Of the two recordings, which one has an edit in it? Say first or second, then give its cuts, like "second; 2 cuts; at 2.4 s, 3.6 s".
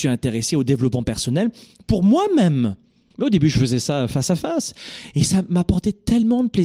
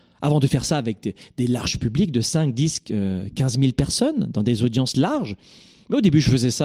first; 1 cut; at 3.1 s